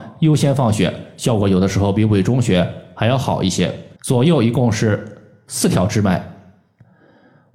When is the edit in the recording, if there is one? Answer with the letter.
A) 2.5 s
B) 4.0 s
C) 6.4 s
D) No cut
B